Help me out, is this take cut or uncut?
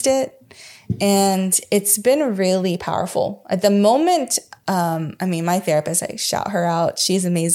uncut